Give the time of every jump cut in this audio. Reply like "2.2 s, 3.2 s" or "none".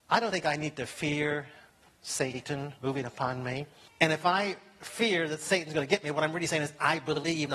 3.9 s